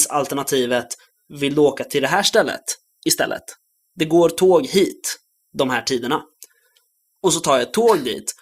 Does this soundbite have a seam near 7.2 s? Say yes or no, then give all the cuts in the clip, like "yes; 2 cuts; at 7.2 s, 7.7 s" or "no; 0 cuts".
yes; 1 cut; at 7.2 s